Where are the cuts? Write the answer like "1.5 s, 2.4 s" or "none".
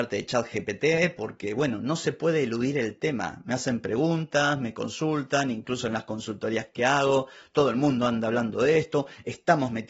none